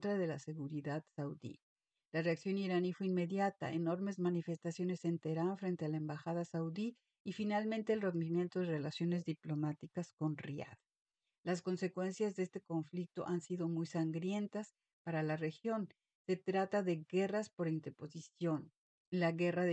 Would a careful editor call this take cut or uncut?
uncut